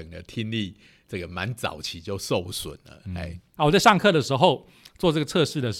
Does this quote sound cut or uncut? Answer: cut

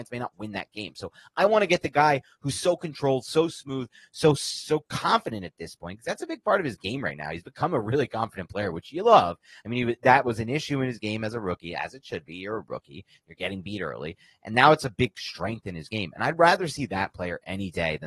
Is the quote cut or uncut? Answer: uncut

